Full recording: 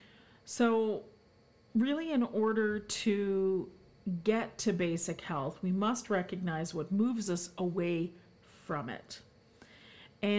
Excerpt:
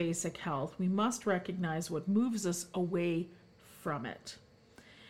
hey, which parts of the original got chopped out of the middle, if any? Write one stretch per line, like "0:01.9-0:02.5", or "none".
none